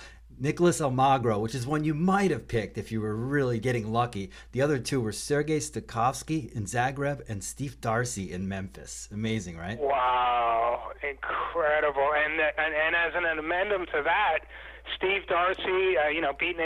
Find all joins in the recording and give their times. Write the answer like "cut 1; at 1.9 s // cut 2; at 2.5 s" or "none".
cut 1; at 3.6 s